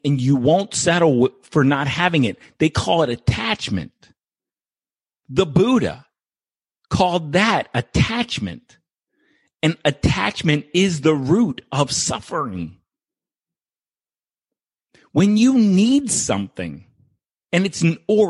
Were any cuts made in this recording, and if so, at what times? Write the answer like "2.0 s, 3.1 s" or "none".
none